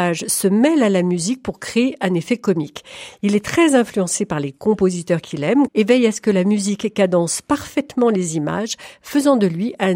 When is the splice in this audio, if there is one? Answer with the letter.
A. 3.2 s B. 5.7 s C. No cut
B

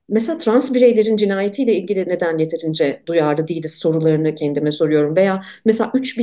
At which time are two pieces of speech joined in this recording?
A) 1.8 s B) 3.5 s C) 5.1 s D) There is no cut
D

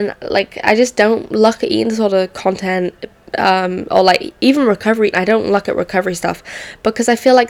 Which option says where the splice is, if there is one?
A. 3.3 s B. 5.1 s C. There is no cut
B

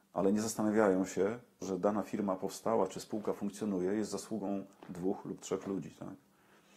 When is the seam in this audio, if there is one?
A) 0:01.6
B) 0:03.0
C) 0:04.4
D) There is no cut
A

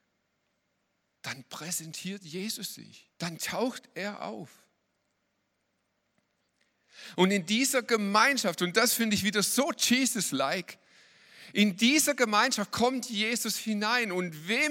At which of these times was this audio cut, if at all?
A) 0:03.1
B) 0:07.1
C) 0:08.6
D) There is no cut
A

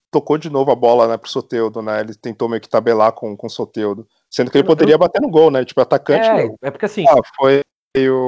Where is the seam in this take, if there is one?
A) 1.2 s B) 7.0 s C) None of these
B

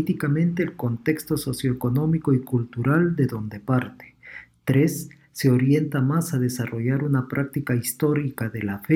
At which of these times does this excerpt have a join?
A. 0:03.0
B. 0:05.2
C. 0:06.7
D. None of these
D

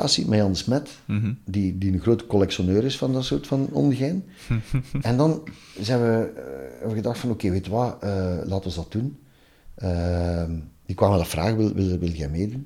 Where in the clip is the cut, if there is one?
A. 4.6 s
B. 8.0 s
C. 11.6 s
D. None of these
D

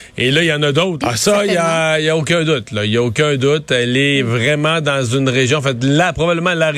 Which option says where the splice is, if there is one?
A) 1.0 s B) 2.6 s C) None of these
A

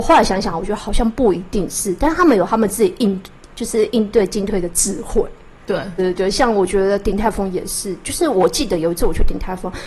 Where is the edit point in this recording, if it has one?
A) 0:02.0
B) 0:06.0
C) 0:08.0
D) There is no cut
B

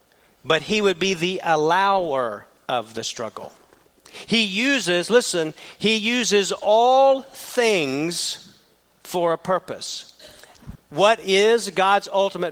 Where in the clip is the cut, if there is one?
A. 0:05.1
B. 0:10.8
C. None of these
B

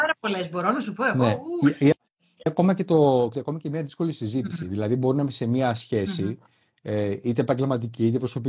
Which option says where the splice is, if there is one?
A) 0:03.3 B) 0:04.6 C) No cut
A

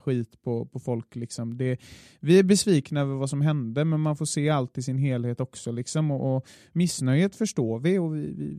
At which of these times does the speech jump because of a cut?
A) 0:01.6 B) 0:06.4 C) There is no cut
C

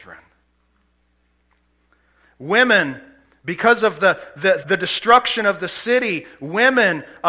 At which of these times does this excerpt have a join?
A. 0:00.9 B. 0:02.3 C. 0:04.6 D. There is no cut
C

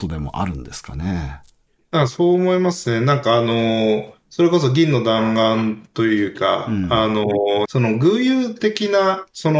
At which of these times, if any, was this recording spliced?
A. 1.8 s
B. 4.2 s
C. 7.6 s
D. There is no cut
C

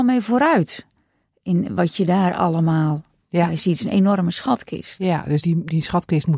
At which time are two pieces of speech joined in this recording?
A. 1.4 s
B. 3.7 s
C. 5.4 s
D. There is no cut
C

